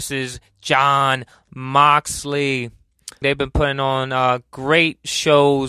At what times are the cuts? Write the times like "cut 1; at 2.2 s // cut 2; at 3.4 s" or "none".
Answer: cut 1; at 3.2 s

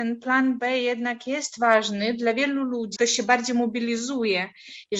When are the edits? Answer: cut 1; at 3.0 s

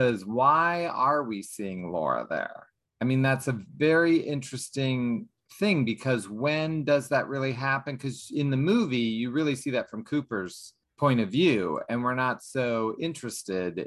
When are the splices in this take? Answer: none

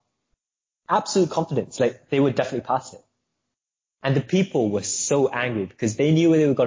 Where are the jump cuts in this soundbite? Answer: none

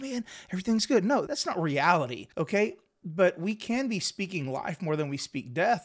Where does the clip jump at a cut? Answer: cut 1; at 1.3 s // cut 2; at 2.3 s

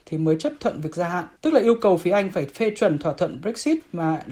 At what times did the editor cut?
cut 1; at 1.4 s

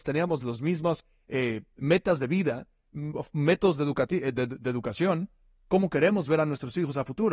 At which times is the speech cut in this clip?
none

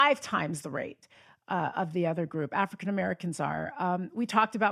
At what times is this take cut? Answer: none

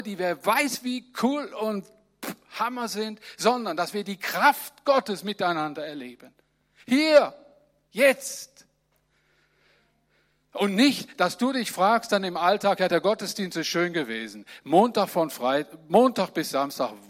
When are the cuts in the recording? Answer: none

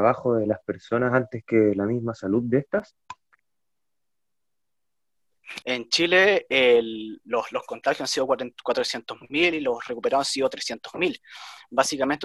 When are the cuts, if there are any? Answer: cut 1; at 5.6 s

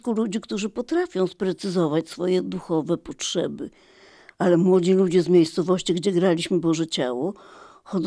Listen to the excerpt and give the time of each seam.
none

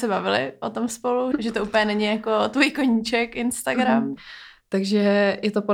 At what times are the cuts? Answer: cut 1; at 1.3 s // cut 2; at 4.2 s

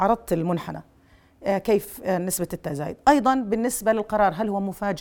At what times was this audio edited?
none

